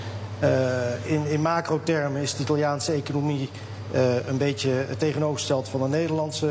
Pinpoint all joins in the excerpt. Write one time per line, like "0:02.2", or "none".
0:01.0